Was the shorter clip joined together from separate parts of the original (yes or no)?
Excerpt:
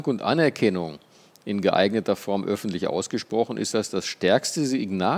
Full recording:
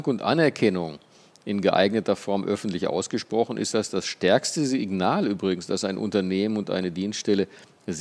no